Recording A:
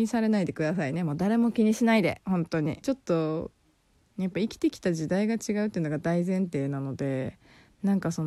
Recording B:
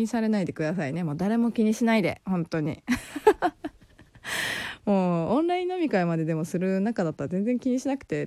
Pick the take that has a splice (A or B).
A